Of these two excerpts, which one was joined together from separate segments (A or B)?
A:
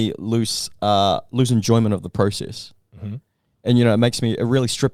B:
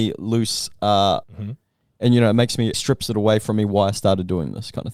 B